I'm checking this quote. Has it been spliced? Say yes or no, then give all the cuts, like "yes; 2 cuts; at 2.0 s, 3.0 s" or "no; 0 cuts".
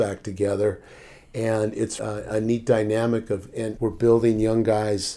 yes; 2 cuts; at 2.0 s, 3.8 s